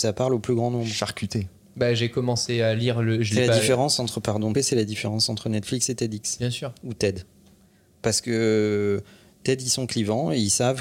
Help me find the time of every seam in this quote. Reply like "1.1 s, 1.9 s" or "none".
4.5 s